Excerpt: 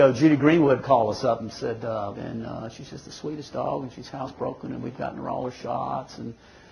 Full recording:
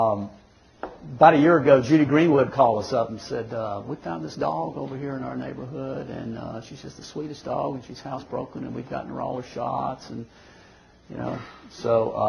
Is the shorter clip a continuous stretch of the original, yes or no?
no